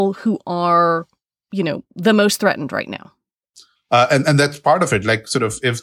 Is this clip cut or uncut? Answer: cut